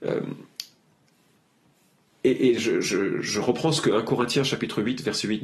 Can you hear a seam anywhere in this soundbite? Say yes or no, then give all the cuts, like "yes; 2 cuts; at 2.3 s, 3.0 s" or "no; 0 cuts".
no; 0 cuts